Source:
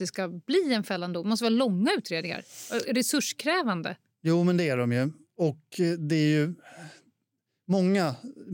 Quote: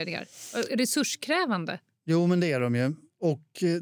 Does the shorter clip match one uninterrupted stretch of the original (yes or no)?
yes